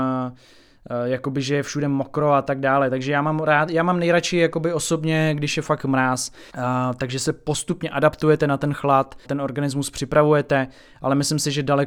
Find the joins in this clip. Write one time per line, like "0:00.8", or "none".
0:06.5
0:09.2